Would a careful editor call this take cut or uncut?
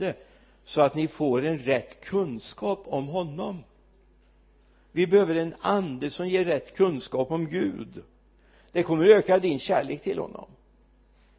uncut